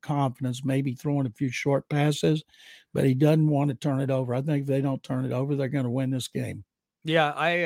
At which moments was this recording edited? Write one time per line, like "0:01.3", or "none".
none